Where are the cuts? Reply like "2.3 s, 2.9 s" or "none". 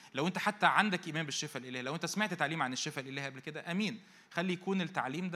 none